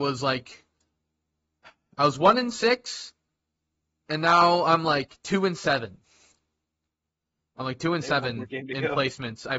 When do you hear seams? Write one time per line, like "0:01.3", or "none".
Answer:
none